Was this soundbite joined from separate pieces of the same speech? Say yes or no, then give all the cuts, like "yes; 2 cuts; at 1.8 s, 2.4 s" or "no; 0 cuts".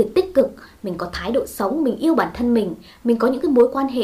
no; 0 cuts